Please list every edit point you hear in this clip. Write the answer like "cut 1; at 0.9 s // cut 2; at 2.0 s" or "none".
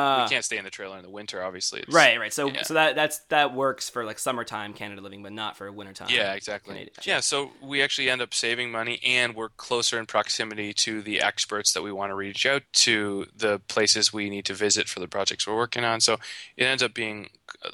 cut 1; at 7.0 s // cut 2; at 12.7 s